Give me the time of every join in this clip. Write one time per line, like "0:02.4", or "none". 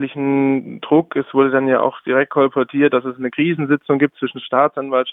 none